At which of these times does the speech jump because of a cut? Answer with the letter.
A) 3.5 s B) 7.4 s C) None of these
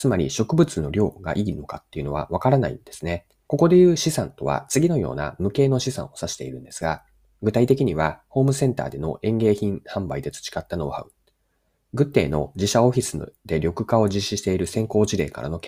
A